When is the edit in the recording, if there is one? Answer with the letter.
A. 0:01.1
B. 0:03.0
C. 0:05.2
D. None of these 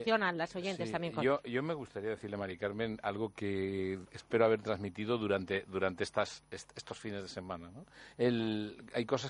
D